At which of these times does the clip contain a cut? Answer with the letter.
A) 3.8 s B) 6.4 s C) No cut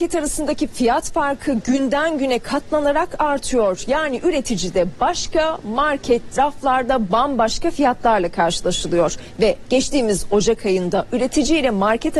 B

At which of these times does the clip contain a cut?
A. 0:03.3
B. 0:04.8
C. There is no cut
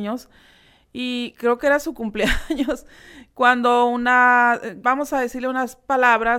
B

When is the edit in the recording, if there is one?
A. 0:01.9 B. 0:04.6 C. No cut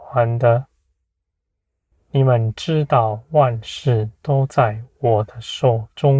A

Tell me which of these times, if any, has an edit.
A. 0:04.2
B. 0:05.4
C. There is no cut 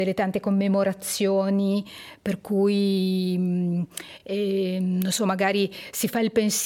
C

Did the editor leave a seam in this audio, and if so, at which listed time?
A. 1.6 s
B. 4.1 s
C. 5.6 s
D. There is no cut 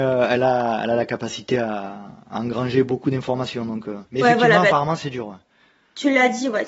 B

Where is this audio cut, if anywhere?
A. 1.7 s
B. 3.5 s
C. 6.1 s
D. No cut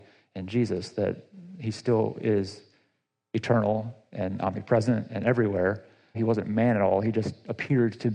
C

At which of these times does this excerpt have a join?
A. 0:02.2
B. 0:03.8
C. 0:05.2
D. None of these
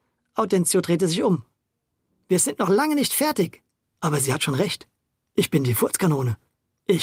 B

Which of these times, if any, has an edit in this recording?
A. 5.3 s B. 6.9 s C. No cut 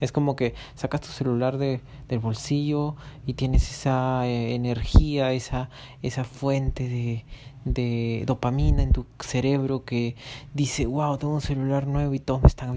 C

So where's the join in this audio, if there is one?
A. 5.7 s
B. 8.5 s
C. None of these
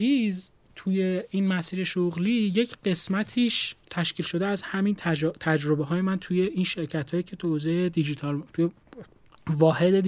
C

